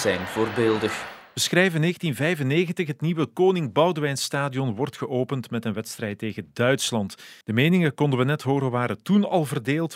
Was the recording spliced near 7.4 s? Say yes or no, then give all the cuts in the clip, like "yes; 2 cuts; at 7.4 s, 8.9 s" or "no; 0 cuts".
yes; 1 cut; at 7.4 s